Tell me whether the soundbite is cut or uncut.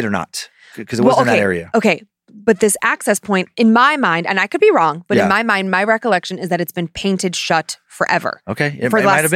uncut